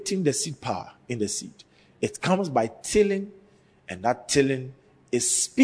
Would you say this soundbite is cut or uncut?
uncut